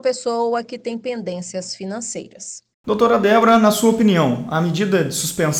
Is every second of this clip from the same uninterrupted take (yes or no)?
no